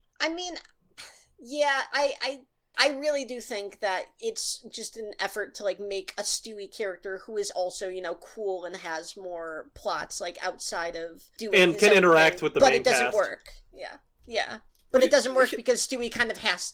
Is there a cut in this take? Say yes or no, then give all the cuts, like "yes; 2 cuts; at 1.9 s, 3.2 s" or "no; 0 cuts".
no; 0 cuts